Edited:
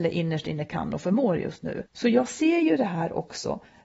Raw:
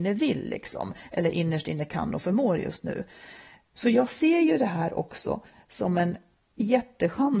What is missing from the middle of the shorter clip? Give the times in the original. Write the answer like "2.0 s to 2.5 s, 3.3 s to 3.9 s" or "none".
3.1 s to 3.7 s